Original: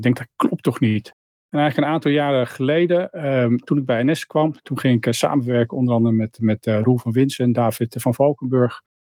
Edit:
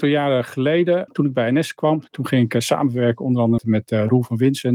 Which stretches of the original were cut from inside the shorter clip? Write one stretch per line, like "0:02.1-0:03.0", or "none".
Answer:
0:03.1-0:03.6
0:06.1-0:06.3